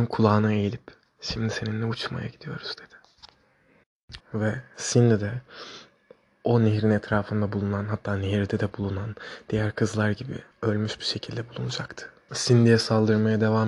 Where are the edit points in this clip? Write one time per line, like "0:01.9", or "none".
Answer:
0:04.2
0:10.5
0:12.3